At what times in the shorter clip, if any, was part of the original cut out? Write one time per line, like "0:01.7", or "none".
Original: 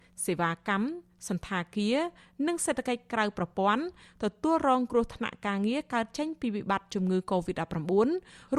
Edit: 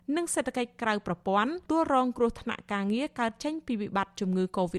0:01.7